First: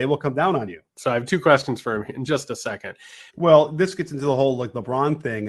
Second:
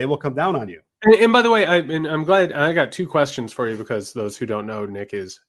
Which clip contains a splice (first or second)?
first